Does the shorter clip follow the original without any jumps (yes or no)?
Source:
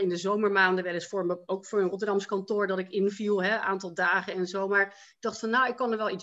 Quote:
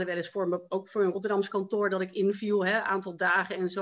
yes